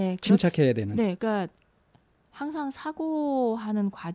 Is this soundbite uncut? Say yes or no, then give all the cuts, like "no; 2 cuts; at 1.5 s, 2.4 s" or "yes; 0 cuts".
no; 1 cut; at 1.2 s